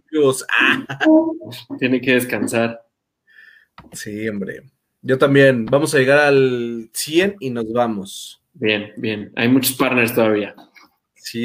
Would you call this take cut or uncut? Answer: uncut